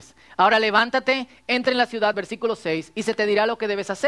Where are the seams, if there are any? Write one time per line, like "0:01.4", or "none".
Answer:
none